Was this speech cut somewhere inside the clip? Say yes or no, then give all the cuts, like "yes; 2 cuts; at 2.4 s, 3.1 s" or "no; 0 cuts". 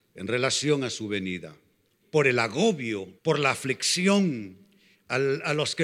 yes; 2 cuts; at 2.0 s, 3.2 s